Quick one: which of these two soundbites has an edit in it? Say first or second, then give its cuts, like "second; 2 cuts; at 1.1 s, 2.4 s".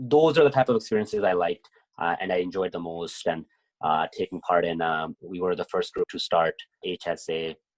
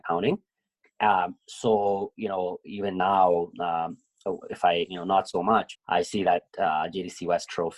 second; 1 cut; at 5.7 s